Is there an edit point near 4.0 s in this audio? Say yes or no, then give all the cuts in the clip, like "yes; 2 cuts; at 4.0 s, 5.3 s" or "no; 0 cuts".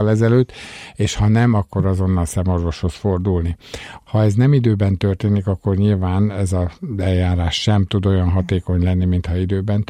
yes; 1 cut; at 4.0 s